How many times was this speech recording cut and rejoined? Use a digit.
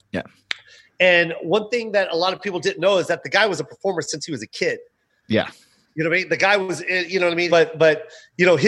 1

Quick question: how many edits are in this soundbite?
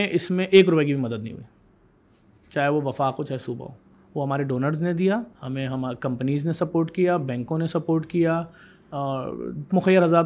1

